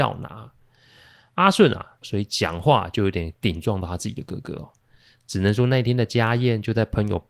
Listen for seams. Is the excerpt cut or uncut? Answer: cut